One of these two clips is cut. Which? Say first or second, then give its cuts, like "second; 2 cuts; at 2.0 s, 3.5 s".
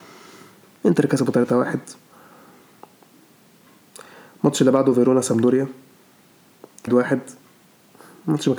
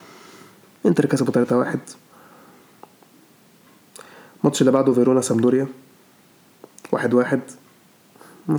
first; 1 cut; at 6.9 s